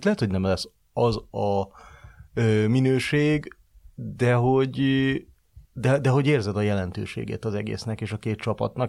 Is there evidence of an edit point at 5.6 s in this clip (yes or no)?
yes